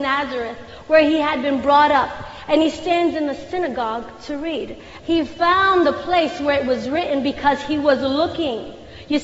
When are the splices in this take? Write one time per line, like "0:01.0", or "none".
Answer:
0:05.0